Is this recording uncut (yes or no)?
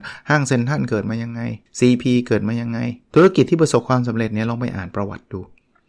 no